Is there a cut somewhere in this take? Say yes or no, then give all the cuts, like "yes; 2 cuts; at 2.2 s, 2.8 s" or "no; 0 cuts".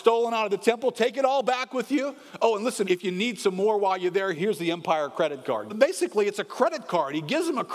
yes; 3 cuts; at 2.8 s, 4.3 s, 5.7 s